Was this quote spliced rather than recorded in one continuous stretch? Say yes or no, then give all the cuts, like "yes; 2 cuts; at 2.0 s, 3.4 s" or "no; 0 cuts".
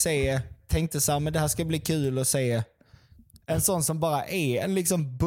yes; 1 cut; at 3.4 s